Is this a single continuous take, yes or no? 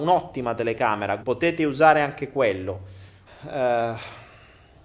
no